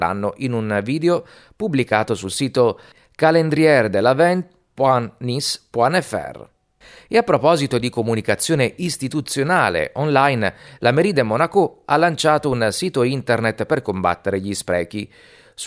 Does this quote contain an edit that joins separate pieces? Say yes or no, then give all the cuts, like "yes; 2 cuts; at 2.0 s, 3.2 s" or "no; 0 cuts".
no; 0 cuts